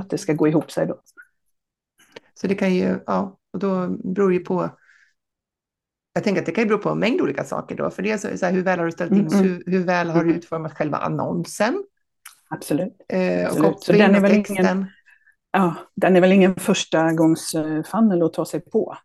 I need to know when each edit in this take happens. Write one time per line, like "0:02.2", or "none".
0:09.3